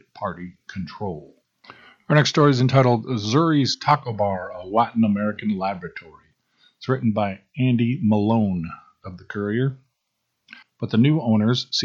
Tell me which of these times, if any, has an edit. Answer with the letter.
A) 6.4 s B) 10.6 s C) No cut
B